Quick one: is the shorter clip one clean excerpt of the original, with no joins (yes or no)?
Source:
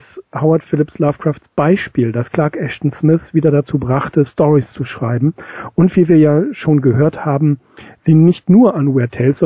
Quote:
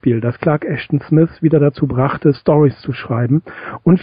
yes